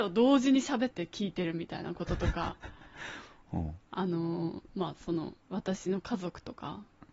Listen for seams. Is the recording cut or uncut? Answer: cut